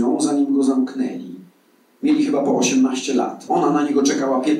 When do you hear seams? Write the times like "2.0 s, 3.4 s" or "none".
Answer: none